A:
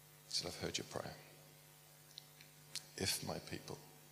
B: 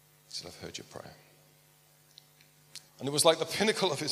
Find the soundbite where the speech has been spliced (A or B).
B